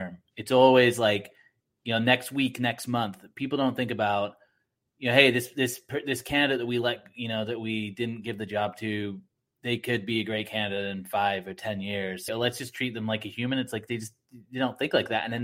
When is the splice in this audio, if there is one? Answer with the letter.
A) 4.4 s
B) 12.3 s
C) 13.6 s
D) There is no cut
B